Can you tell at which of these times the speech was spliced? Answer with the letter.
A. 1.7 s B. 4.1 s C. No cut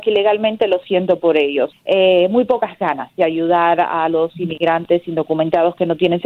A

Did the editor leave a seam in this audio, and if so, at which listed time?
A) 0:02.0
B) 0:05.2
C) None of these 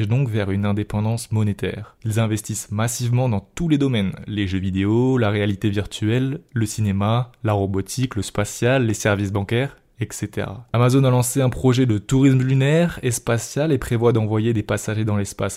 A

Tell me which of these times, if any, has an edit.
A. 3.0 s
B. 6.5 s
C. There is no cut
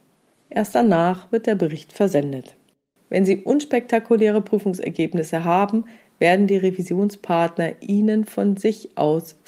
A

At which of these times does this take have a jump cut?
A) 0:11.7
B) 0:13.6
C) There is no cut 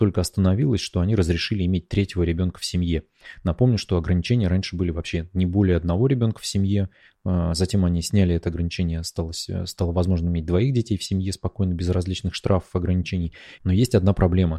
B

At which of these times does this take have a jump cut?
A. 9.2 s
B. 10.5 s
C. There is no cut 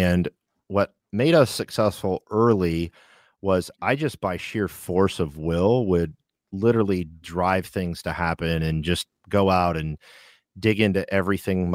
A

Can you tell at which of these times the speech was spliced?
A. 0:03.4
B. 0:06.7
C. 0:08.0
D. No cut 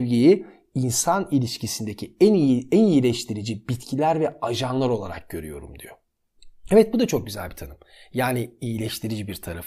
D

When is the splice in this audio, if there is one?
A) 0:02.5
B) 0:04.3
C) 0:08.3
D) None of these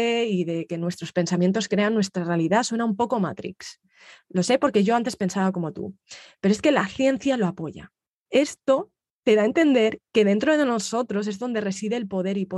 C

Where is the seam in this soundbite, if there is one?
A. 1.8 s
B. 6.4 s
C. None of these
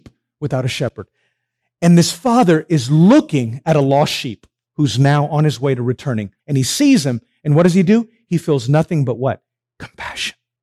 B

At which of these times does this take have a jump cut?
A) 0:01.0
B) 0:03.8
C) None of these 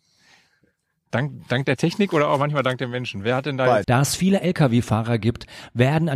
B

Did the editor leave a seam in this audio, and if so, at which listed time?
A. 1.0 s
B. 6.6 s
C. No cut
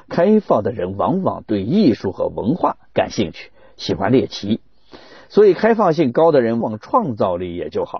B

